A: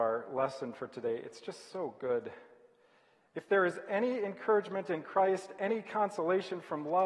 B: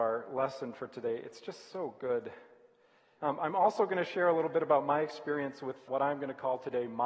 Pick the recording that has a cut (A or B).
B